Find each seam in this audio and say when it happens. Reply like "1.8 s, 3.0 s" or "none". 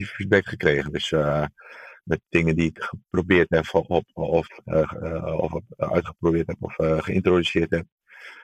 none